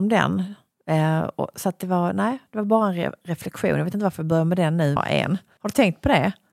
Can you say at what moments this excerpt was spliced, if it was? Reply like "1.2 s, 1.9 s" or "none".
5.0 s